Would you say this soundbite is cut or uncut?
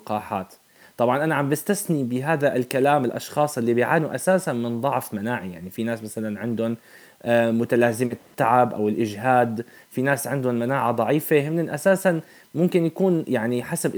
uncut